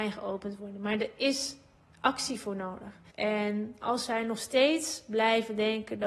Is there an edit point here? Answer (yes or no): yes